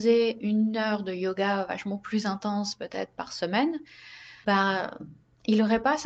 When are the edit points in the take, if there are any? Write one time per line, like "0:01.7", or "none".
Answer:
0:04.4